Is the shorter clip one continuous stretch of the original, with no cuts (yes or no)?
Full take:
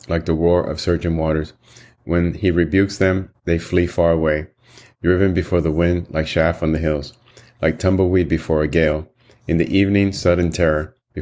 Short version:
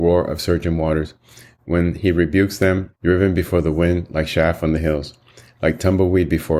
no